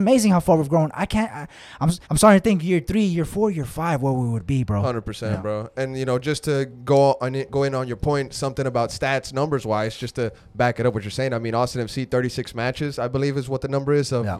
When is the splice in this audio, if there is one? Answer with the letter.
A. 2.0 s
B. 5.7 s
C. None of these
A